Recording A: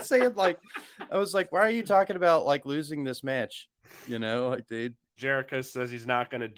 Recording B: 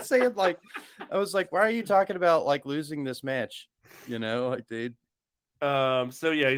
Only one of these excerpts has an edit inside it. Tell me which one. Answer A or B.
A